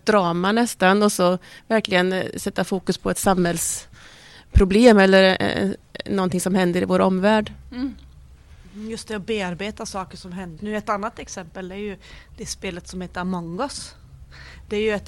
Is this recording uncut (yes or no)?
no